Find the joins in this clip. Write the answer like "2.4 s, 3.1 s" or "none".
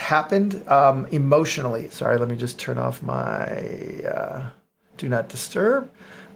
1.9 s